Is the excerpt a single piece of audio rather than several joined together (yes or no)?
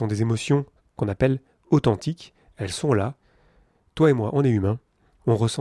yes